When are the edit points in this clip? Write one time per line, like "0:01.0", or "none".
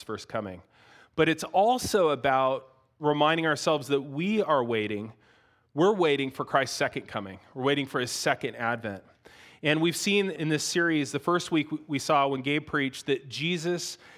none